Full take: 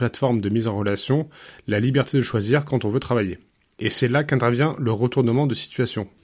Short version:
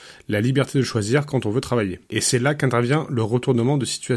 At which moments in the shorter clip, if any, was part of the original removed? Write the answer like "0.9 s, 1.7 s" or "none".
2.1 s